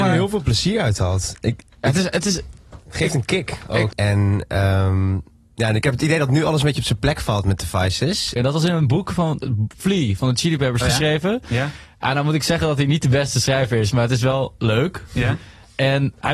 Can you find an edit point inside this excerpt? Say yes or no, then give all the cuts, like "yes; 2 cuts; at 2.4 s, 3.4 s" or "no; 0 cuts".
yes; 3 cuts; at 3.9 s, 8.4 s, 10.8 s